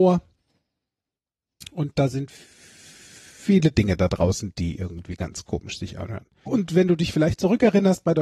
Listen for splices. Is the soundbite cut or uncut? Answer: cut